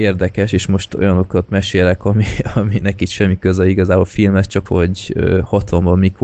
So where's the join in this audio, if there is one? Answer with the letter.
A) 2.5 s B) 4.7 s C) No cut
B